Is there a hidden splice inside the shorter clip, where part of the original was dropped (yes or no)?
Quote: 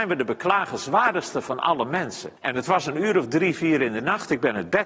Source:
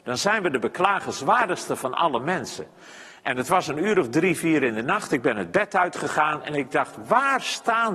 yes